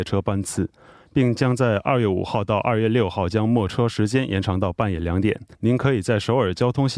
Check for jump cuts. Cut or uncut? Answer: cut